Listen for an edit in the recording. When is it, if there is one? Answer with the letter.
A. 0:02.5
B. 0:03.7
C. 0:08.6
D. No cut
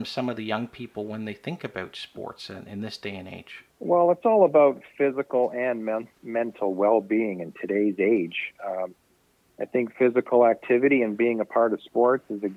B